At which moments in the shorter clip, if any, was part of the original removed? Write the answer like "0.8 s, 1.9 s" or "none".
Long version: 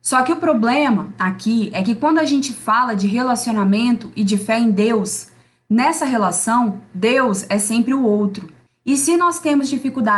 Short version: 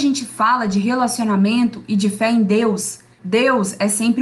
3.2 s